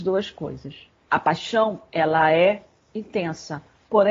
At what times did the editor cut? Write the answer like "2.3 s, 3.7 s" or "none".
1.1 s